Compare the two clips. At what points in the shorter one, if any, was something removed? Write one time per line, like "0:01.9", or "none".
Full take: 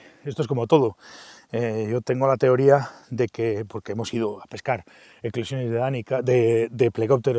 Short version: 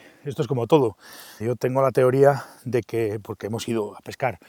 0:01.4